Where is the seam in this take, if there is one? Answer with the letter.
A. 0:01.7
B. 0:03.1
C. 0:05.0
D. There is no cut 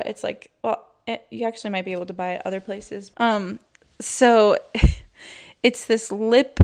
B